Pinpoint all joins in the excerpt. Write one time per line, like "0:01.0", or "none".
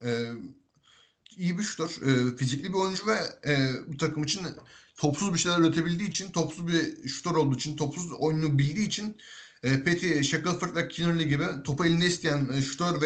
none